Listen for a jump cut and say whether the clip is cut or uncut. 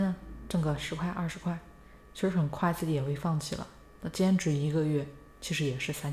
cut